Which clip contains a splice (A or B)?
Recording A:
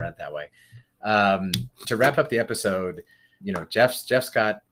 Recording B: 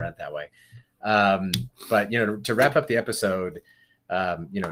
A